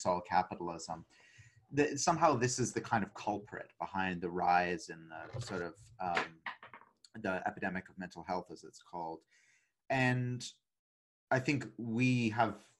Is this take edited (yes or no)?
no